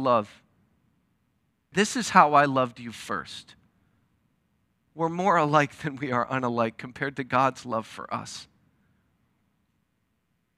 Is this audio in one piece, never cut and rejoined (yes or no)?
no